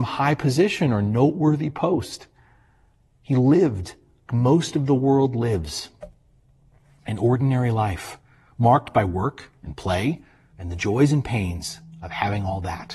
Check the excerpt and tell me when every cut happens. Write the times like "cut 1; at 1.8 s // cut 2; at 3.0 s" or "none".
cut 1; at 4.3 s // cut 2; at 10.5 s